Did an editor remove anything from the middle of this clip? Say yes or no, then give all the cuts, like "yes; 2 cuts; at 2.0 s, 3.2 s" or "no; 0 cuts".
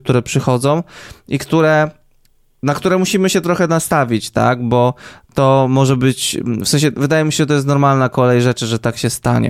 no; 0 cuts